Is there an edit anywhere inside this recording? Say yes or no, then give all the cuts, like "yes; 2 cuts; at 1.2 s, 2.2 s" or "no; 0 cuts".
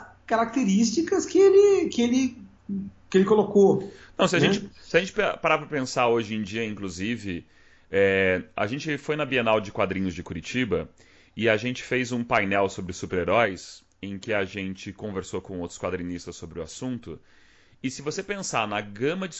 no; 0 cuts